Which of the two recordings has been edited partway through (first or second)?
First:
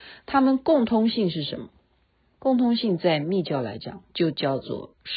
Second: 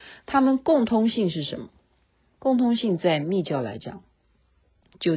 first